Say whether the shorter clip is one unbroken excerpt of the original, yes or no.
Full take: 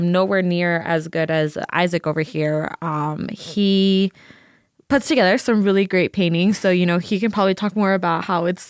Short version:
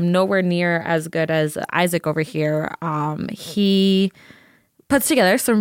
yes